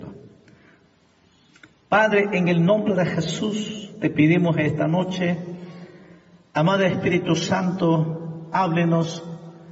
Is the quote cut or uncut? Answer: uncut